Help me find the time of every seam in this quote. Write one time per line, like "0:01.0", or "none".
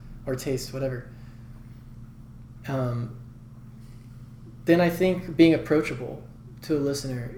none